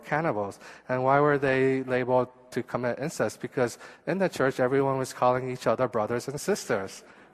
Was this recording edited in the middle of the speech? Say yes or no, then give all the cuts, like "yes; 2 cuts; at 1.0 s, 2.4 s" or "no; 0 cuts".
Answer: no; 0 cuts